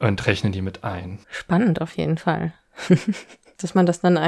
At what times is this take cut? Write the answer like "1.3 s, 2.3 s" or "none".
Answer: 1.2 s